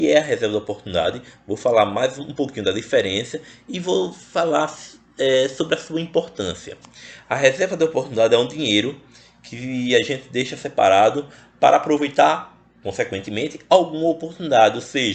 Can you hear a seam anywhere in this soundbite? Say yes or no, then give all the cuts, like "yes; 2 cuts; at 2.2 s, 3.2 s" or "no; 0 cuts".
no; 0 cuts